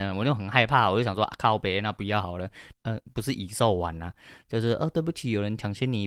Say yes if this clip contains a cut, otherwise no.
yes